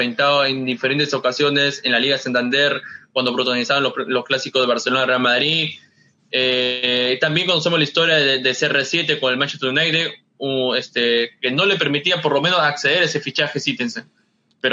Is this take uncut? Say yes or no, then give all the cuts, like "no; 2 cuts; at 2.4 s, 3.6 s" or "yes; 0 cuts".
yes; 0 cuts